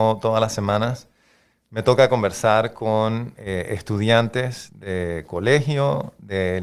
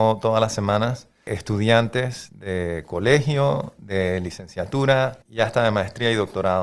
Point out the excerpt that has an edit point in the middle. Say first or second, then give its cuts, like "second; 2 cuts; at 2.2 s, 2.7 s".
second; 2 cuts; at 1.3 s, 5.2 s